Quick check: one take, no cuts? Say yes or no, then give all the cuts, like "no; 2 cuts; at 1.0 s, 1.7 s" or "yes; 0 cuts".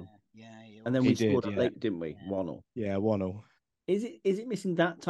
no; 1 cut; at 1.7 s